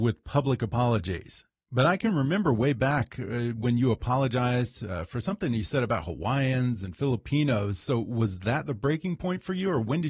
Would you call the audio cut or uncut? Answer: uncut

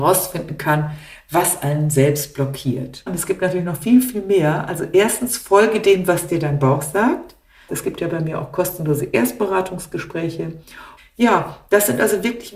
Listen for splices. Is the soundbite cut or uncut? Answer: cut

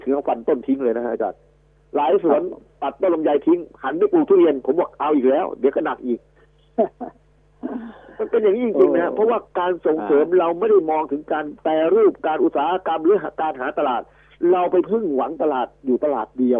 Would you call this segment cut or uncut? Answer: uncut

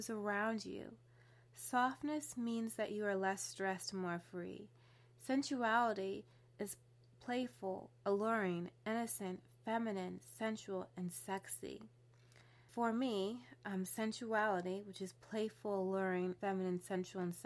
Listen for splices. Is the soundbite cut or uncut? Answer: cut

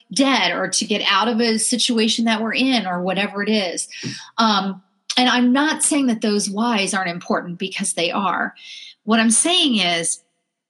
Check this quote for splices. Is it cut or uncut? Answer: uncut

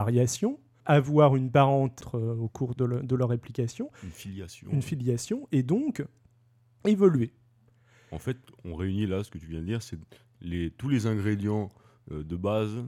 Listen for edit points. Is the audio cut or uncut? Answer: uncut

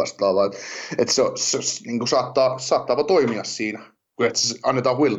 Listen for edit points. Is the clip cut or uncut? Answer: cut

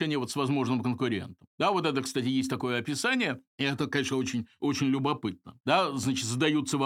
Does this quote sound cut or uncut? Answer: cut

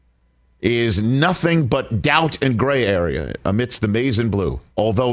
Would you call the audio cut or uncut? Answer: uncut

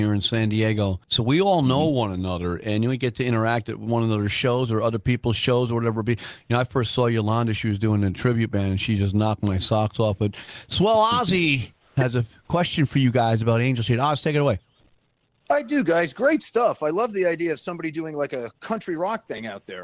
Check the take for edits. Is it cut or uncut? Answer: cut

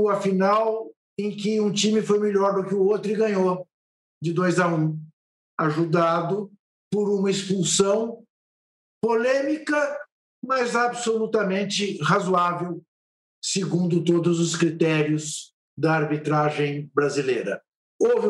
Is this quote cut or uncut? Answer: uncut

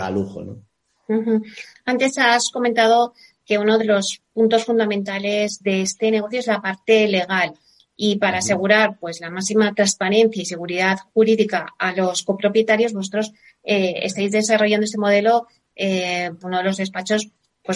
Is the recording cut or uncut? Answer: cut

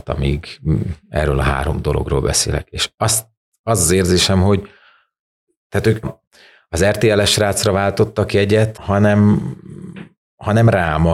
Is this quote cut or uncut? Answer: cut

